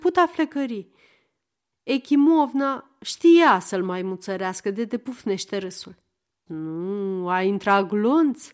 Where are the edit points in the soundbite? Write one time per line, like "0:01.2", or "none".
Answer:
0:01.7
0:06.5

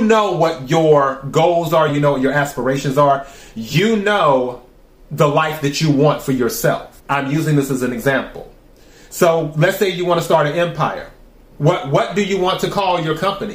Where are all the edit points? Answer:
0:01.9
0:07.0
0:11.5

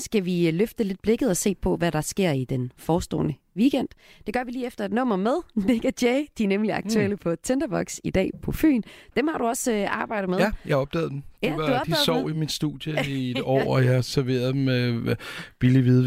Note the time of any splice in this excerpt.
none

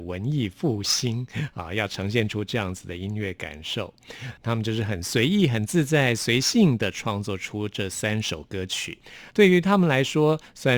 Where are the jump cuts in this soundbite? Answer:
0:09.3

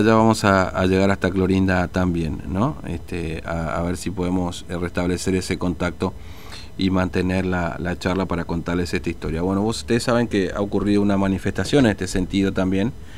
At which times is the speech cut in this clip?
none

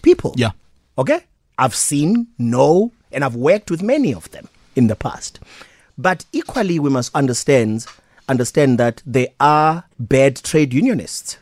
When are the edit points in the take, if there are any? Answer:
0:07.1
0:09.9

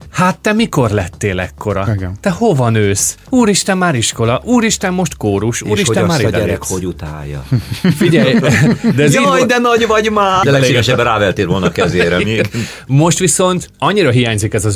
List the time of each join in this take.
0:10.4

